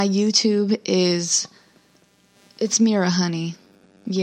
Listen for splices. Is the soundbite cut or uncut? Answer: uncut